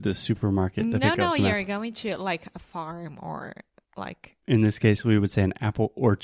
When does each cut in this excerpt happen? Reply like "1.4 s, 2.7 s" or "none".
none